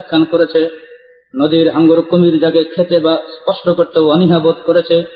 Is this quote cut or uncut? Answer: uncut